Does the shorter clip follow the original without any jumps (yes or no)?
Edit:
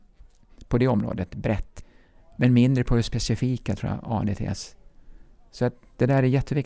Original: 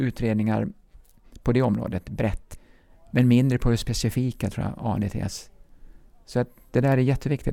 yes